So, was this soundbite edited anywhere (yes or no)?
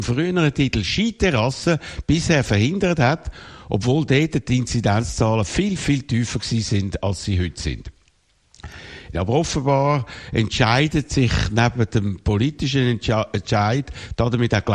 yes